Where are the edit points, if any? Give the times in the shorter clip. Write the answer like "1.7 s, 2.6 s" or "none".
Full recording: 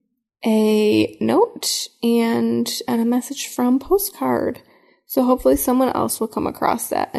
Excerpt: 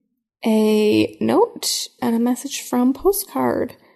2.0 s